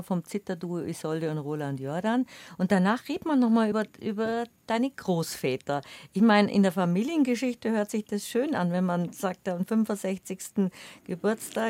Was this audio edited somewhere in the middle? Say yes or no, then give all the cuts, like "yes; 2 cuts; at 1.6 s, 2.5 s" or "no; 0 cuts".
no; 0 cuts